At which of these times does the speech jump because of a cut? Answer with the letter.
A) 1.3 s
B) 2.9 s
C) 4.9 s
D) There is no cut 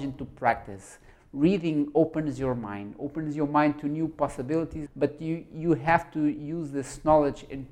C